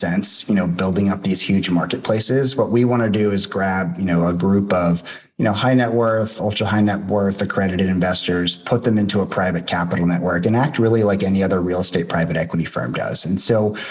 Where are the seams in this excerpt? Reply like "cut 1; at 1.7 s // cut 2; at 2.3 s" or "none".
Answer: none